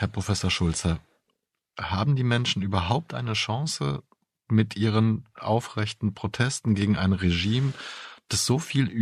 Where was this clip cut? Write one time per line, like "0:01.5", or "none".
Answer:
none